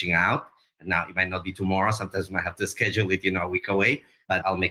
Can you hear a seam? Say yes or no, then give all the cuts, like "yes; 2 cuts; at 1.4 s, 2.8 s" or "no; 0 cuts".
no; 0 cuts